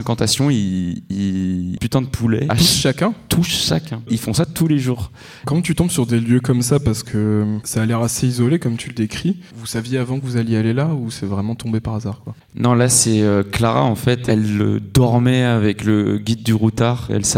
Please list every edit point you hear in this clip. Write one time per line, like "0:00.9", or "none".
0:01.8